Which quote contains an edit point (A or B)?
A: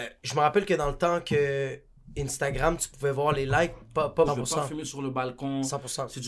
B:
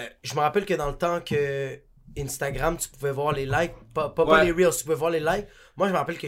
A